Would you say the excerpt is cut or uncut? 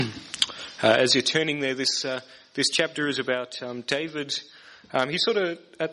uncut